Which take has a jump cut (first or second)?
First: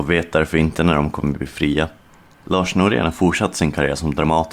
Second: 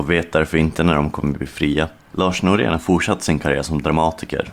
second